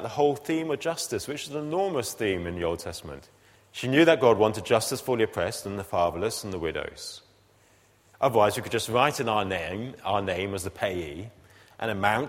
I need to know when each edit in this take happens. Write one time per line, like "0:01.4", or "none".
0:03.6
0:08.1